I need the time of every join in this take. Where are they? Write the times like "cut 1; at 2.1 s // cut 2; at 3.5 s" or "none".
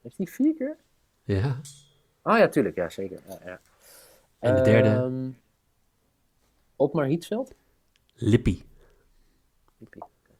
none